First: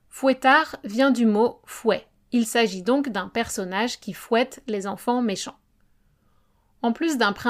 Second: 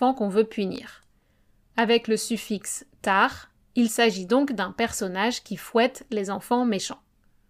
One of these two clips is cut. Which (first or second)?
first